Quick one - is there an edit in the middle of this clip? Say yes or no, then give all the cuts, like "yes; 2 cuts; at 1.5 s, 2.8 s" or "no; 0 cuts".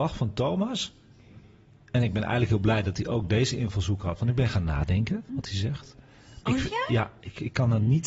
yes; 2 cuts; at 5.3 s, 6.4 s